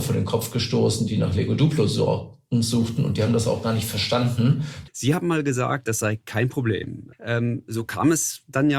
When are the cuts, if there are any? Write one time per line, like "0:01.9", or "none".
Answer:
0:04.9
0:07.1